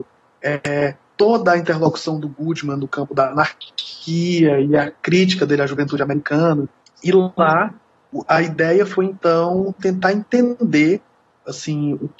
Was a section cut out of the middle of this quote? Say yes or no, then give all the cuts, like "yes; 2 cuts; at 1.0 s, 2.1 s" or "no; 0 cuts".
yes; 1 cut; at 6.8 s